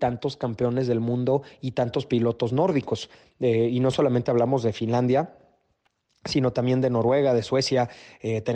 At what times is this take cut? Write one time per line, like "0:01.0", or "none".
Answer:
none